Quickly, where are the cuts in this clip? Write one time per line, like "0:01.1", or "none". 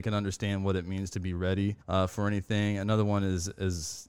0:01.8